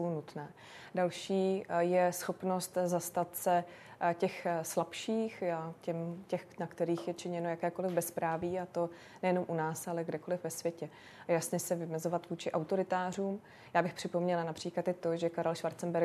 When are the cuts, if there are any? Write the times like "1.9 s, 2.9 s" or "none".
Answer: none